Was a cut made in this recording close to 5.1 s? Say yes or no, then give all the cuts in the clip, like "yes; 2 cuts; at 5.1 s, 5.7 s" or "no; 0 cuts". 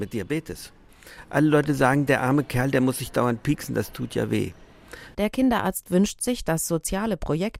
yes; 1 cut; at 5.1 s